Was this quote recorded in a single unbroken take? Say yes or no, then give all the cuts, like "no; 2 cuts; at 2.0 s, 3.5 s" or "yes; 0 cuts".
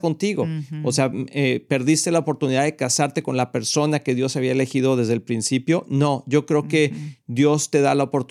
yes; 0 cuts